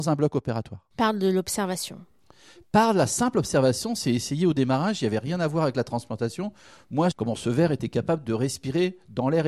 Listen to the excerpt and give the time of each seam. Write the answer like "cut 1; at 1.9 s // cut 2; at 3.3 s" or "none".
cut 1; at 7.1 s